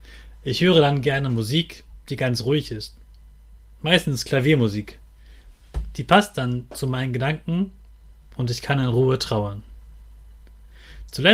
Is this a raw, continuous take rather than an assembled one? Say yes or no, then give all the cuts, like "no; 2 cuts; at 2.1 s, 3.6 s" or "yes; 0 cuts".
yes; 0 cuts